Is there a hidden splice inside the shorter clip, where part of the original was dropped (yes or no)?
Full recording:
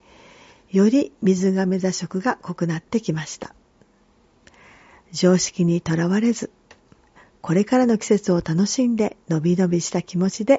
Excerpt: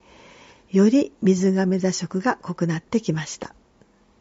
no